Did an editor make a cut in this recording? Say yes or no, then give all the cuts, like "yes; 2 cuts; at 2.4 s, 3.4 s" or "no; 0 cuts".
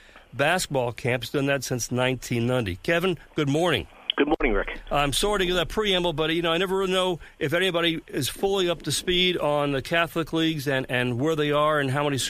no; 0 cuts